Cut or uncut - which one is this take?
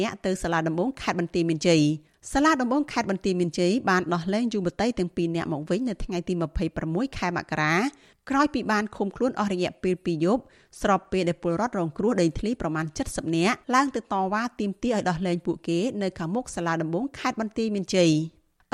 cut